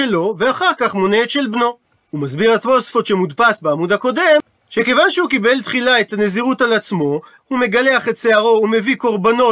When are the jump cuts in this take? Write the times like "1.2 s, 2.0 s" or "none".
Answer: 7.4 s